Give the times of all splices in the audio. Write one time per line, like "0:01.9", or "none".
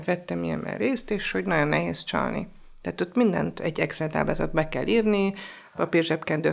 none